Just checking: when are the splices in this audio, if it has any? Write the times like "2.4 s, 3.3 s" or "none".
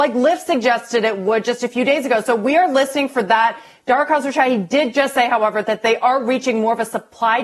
none